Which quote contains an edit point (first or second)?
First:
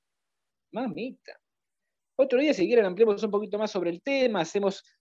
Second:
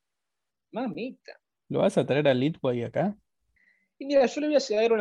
second